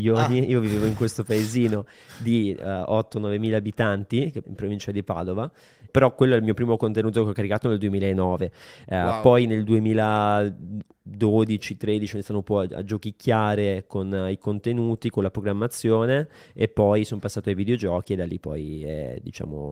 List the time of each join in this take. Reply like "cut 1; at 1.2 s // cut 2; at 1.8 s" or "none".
cut 1; at 4.4 s // cut 2; at 5.9 s

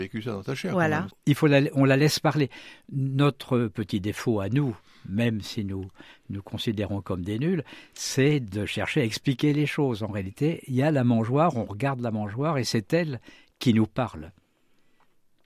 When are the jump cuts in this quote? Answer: cut 1; at 1.1 s

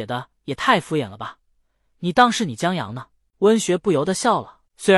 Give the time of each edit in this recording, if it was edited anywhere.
cut 1; at 3.3 s

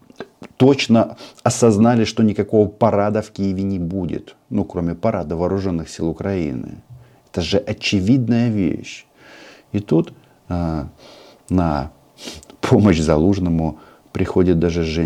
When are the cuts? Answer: none

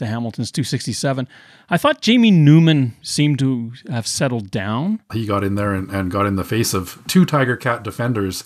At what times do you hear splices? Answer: cut 1; at 3.0 s // cut 2; at 5.1 s

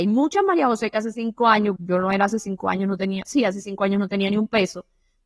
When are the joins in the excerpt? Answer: cut 1; at 1.8 s

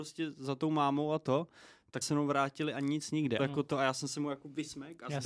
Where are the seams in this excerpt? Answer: cut 1; at 2.0 s // cut 2; at 3.4 s

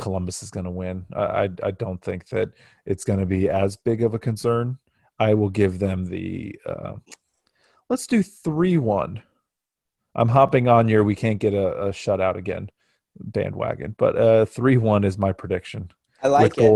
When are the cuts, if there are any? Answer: none

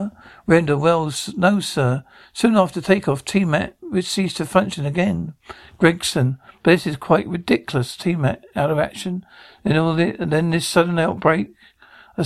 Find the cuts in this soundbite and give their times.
none

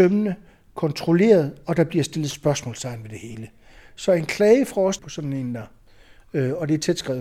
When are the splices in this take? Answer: cut 1; at 5.0 s

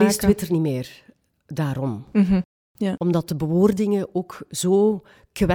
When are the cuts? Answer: none

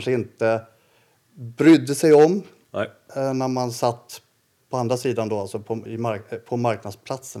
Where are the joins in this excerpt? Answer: cut 1; at 5.9 s

